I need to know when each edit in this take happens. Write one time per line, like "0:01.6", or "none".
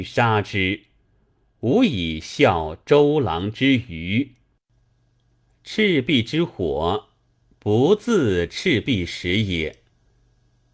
none